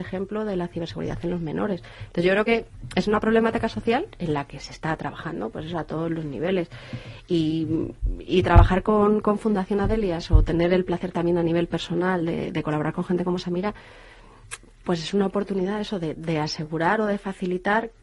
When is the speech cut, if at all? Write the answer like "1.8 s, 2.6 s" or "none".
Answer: 2.1 s, 16.1 s